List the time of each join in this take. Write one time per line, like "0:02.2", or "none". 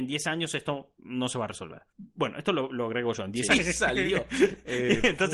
0:01.9
0:03.5